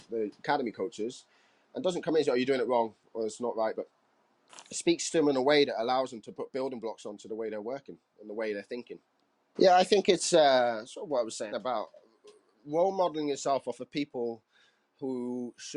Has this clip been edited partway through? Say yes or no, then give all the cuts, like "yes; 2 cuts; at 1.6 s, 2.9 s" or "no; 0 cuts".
yes; 3 cuts; at 3.7 s, 9.5 s, 11.5 s